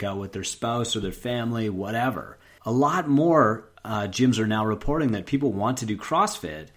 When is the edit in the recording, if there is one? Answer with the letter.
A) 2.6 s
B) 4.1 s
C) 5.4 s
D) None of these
A